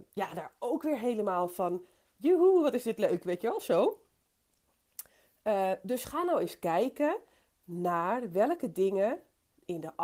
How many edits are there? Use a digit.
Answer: 0